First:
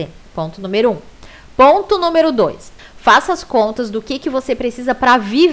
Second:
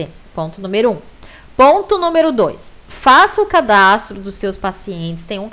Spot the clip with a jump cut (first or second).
first